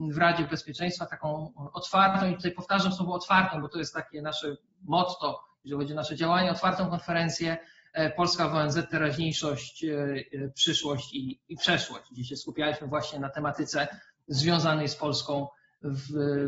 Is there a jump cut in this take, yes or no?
no